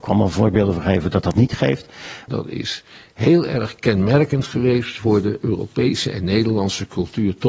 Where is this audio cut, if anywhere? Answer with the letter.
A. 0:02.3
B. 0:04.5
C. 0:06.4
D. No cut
A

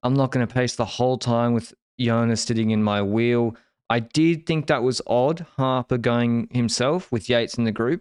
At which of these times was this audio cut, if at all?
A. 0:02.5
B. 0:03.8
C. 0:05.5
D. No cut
A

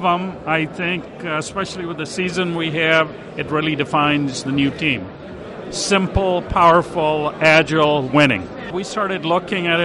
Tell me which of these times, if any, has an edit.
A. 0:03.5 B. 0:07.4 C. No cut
C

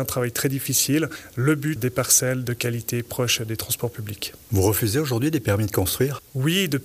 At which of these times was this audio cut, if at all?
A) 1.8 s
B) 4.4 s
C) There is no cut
A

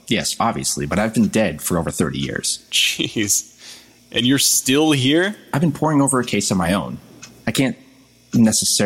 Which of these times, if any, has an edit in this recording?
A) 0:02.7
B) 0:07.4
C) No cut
B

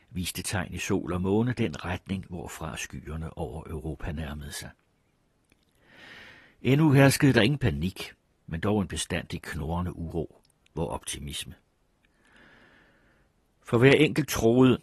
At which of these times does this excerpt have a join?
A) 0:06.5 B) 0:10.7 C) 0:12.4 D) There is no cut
B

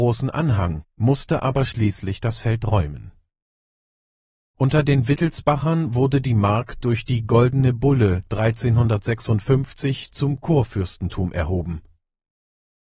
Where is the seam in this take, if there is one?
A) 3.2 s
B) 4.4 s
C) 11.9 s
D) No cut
D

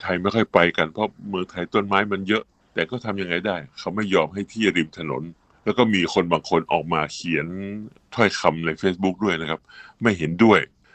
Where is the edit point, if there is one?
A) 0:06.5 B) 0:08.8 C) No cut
C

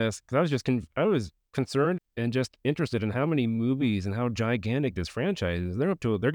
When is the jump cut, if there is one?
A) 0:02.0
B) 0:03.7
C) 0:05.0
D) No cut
A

